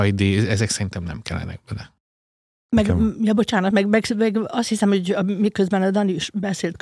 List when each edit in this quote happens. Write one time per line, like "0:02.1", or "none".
none